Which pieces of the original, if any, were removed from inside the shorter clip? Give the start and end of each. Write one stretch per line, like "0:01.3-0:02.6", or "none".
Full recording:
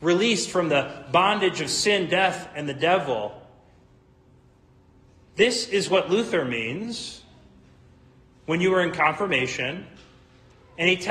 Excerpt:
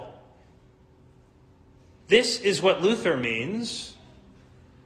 none